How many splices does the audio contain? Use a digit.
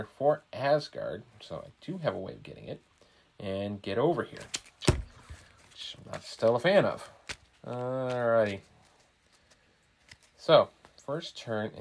1